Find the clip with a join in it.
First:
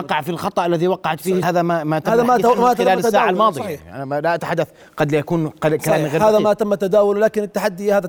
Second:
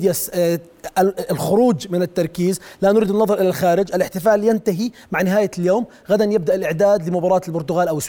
first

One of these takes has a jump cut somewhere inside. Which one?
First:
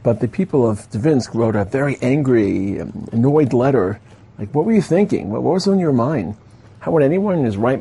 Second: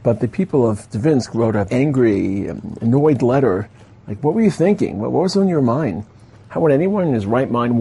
second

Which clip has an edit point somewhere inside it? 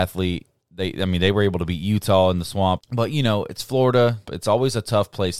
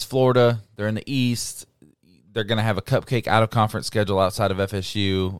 first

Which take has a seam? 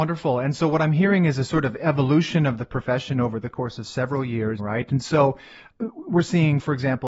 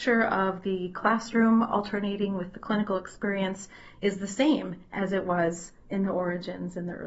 first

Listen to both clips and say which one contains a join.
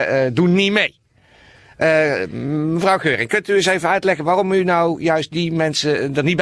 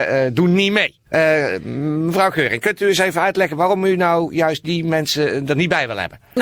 second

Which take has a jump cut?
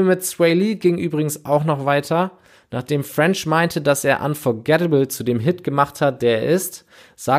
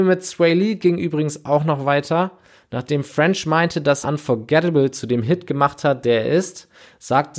second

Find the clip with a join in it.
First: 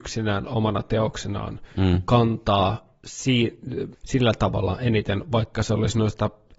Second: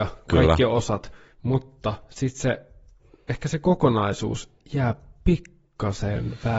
first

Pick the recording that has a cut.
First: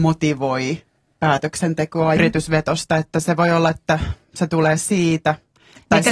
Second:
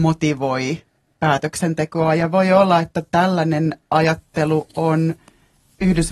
first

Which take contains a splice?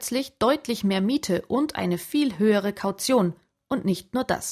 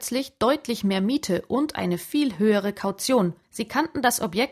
second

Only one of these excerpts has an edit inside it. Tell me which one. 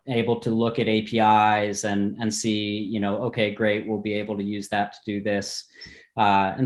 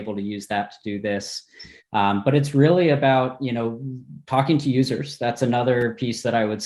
second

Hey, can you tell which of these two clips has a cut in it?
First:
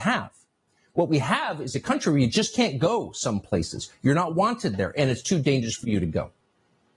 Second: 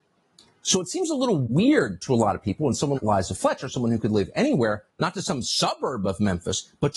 second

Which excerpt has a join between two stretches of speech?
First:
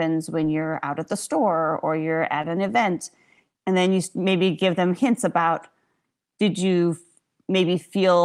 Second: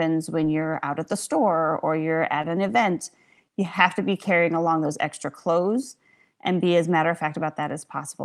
first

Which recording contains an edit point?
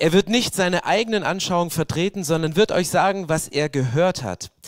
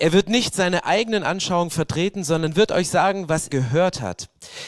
second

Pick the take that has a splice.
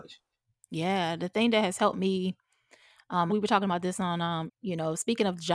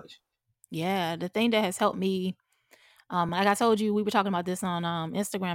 first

